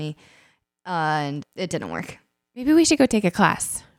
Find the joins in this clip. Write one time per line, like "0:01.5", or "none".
0:01.4